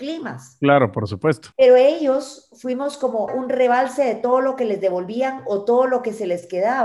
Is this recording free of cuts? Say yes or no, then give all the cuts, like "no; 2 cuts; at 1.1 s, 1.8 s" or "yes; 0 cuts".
no; 2 cuts; at 1.5 s, 3.3 s